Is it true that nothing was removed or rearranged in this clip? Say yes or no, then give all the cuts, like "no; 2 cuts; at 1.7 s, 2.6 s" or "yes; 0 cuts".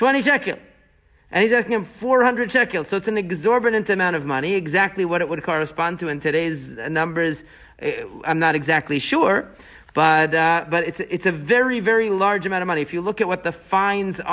yes; 0 cuts